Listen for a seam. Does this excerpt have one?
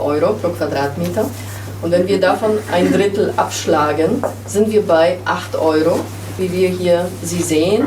yes; 1 cut; at 6.4 s

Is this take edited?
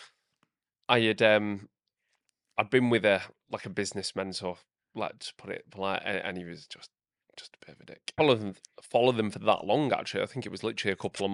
yes; 1 cut; at 8.2 s

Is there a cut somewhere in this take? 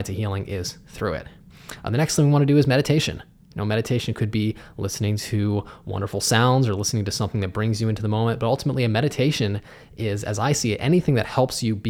no; 0 cuts

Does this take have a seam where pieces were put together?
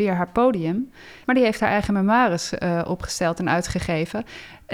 yes; 1 cut; at 1.2 s

